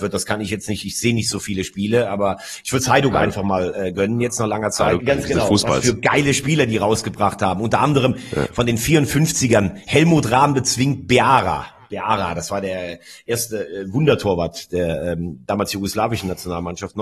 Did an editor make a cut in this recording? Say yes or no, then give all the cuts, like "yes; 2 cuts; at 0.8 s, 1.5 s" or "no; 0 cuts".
yes; 1 cut; at 5.0 s